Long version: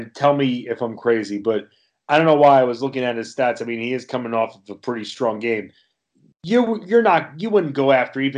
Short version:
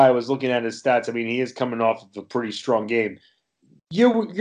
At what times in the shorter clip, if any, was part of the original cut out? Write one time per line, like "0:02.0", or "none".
none